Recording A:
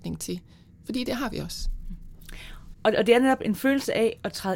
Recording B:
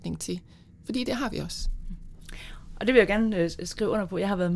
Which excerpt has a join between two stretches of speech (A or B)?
A